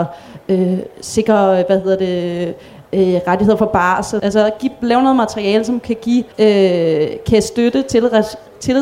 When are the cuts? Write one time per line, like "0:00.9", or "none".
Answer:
0:04.2
0:06.3